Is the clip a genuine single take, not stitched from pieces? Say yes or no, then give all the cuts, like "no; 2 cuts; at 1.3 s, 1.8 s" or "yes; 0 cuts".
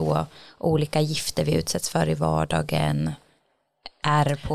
yes; 0 cuts